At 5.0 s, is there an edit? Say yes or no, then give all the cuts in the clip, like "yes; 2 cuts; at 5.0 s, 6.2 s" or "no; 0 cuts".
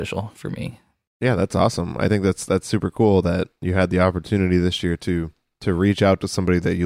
no; 1 cut; at 1.1 s